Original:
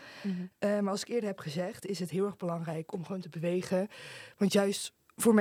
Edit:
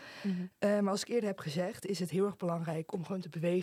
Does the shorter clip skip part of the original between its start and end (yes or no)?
no